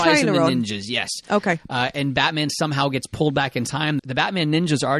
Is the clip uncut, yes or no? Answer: no